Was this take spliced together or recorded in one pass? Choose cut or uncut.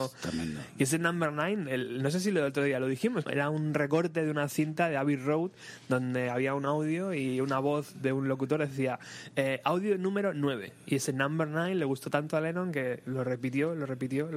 cut